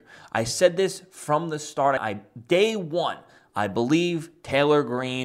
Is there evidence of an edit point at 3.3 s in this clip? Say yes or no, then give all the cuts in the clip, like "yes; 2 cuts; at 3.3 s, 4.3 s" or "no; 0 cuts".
no; 1 cut; at 2.0 s